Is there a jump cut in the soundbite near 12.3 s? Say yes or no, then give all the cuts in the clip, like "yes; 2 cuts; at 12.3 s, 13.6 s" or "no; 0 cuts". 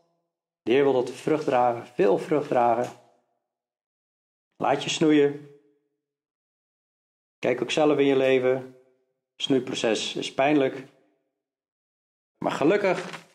yes; 1 cut; at 12.3 s